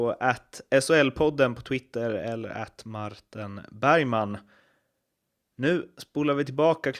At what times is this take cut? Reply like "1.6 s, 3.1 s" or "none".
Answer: none